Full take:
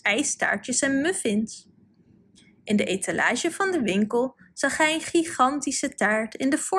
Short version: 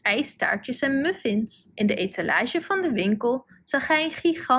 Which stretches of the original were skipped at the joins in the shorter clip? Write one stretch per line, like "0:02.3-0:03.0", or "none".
0:01.7-0:02.6